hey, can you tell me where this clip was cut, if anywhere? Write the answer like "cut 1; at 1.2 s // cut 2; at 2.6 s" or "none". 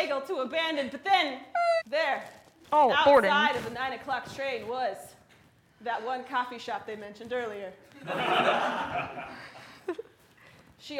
cut 1; at 1.8 s